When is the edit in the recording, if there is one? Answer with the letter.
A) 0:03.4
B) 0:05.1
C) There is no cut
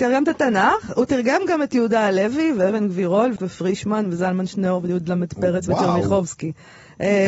A